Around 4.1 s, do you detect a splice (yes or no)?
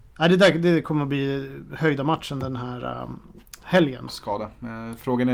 yes